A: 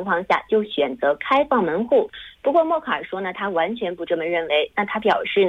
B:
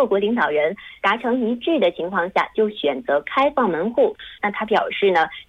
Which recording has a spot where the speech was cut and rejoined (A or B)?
B